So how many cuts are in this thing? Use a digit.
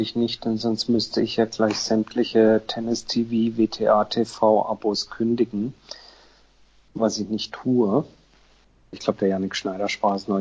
1